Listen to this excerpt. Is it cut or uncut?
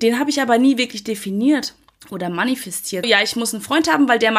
cut